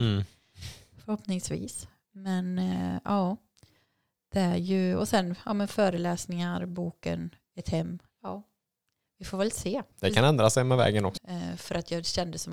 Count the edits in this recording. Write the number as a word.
two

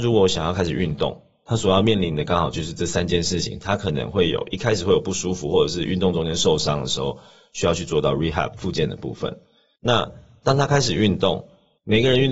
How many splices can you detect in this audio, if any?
zero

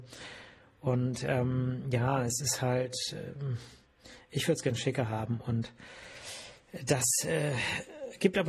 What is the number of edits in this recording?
zero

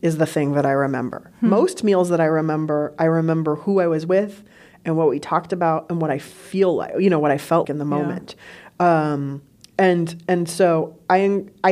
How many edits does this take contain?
one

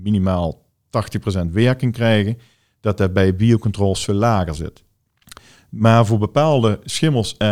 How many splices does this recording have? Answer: zero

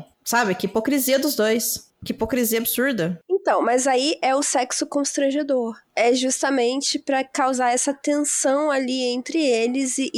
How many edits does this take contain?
zero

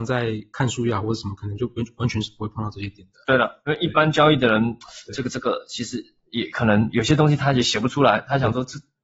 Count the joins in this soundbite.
zero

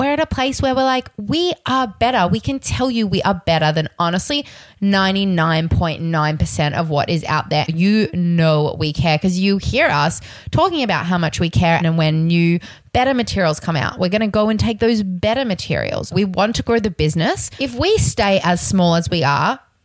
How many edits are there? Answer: three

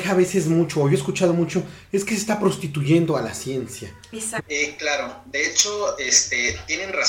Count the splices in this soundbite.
one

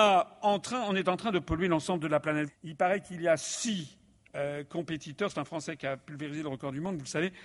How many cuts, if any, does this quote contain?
one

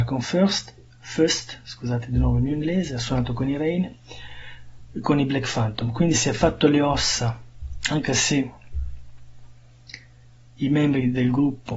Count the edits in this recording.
zero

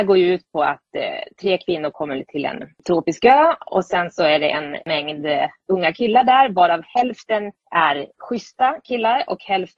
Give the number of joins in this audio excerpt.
zero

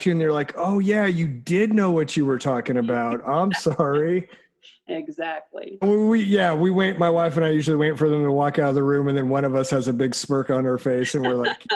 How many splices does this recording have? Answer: one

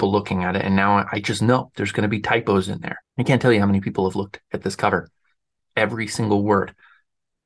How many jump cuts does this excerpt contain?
two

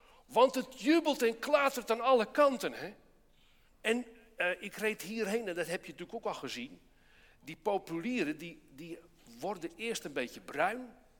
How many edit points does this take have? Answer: one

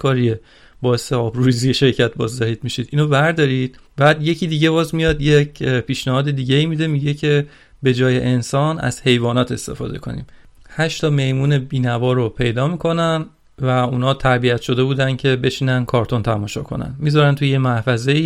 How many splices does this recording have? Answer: one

